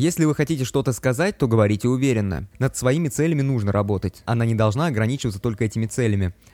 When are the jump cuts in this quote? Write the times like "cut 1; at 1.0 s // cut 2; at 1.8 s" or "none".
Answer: cut 1; at 2.5 s // cut 2; at 4.3 s